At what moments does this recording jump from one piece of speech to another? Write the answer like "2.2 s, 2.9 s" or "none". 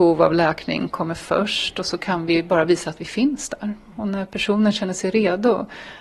none

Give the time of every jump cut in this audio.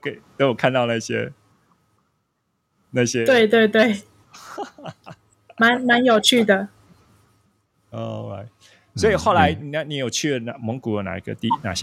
none

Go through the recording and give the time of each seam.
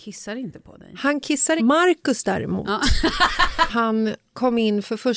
1.6 s, 3.7 s

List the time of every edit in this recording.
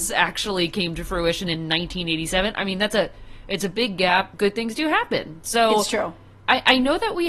4.3 s

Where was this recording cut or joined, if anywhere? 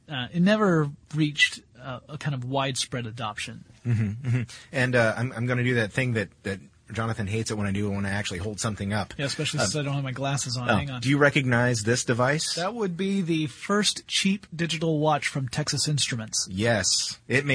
none

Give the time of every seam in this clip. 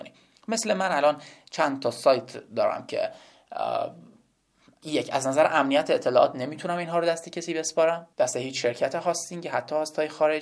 8.1 s

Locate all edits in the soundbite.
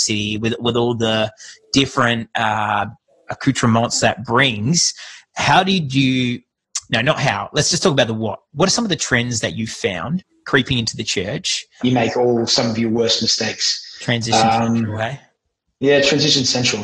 11.8 s

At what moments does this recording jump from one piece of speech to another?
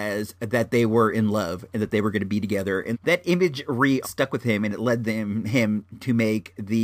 2.9 s, 4.0 s

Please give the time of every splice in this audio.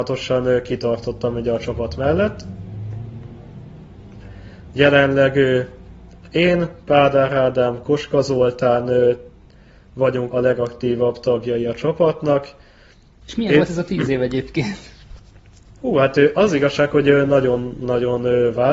10.3 s, 13.2 s

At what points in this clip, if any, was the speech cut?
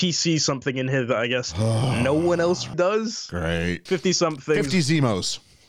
2.7 s, 3.9 s

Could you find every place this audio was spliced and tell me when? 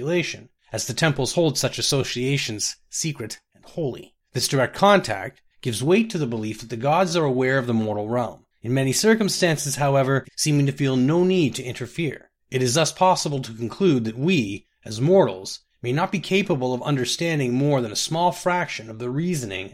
10.2 s

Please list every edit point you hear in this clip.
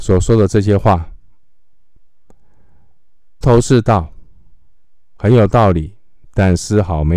3.4 s

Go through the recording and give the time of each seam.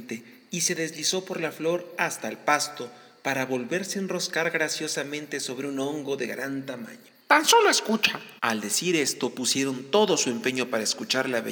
7.2 s, 8.4 s

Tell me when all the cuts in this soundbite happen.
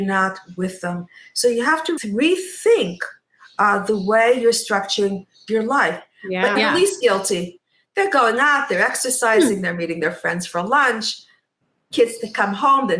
2.0 s, 6.6 s

